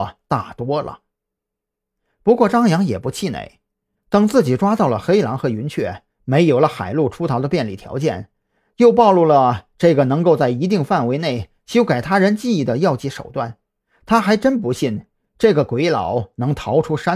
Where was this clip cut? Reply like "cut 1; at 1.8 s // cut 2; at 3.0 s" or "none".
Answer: cut 1; at 4.0 s